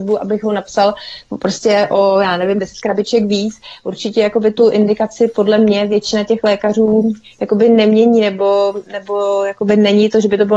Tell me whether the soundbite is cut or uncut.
uncut